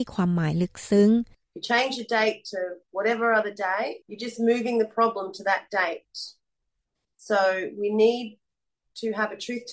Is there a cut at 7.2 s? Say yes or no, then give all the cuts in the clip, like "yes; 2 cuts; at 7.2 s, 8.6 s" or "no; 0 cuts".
no; 1 cut; at 4.0 s